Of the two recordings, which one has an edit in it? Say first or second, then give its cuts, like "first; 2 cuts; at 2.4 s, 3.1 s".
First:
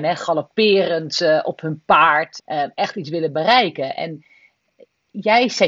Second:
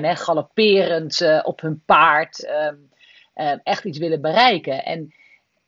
first; 1 cut; at 2.4 s